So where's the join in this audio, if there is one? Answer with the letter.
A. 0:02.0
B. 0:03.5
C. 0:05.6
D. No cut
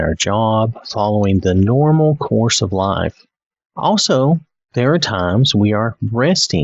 B